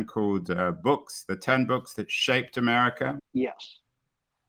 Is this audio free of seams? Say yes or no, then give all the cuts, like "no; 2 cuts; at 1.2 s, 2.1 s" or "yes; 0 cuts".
no; 1 cut; at 3.2 s